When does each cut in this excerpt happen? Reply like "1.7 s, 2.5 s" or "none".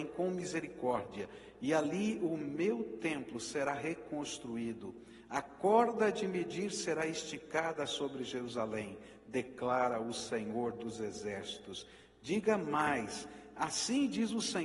none